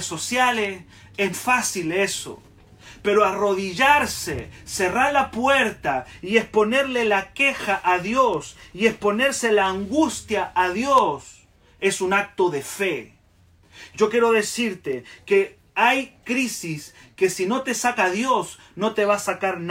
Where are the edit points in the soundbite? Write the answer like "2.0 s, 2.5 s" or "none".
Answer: 1.3 s